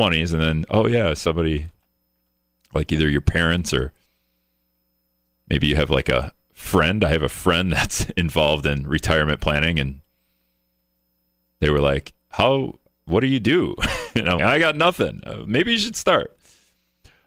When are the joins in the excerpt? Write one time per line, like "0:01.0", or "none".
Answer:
0:14.4